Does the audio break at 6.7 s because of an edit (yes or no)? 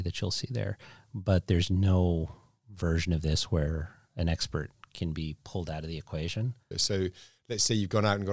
yes